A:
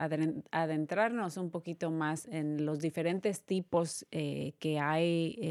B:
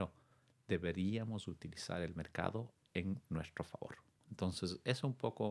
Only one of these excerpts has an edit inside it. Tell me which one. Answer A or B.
A